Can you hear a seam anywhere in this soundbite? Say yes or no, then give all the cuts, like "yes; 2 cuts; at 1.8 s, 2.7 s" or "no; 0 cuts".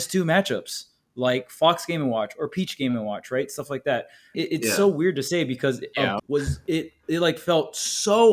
yes; 2 cuts; at 4.3 s, 6.2 s